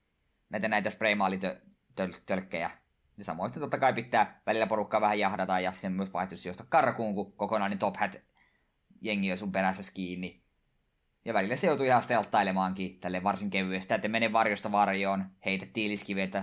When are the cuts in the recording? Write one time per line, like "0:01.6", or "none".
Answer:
0:13.9